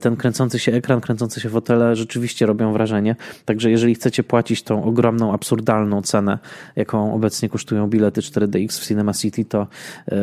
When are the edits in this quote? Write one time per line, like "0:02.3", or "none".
none